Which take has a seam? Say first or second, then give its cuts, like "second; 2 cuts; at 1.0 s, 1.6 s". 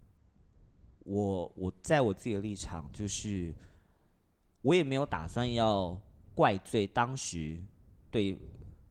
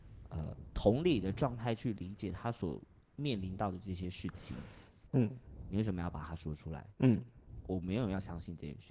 second; 2 cuts; at 5.1 s, 6.9 s